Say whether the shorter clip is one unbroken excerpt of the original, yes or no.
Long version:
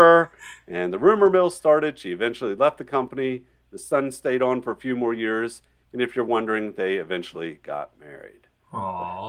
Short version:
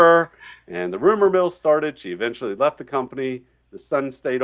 yes